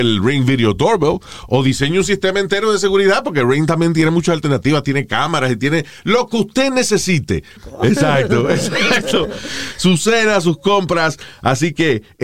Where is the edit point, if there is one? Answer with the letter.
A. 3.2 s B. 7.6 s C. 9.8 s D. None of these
B